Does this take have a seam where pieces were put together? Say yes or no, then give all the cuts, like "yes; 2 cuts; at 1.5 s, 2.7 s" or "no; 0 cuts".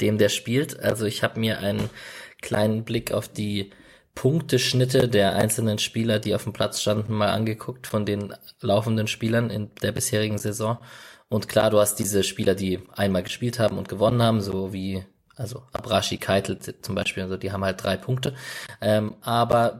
no; 0 cuts